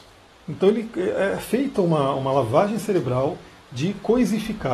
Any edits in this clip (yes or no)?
no